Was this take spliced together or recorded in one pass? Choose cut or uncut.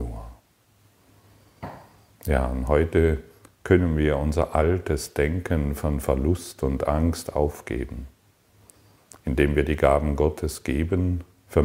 uncut